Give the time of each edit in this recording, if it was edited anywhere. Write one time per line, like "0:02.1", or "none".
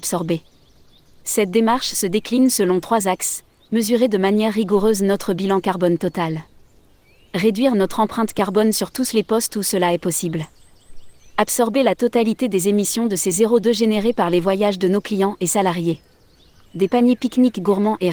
0:16.7